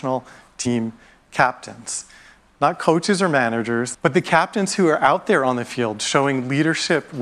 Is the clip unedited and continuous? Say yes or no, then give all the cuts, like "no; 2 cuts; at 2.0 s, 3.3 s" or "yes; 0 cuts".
no; 1 cut; at 3.9 s